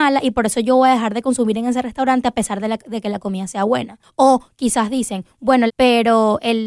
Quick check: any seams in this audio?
yes; 1 cut; at 5.7 s

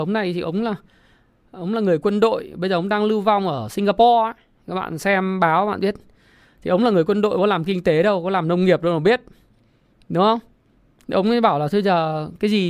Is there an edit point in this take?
no; 0 cuts

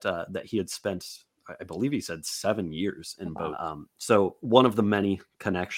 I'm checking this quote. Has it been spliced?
yes; 1 cut; at 3.5 s

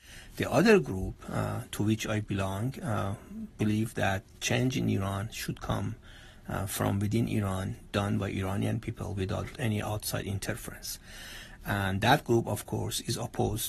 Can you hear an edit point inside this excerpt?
no; 0 cuts

